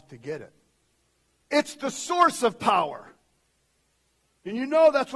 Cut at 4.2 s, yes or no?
no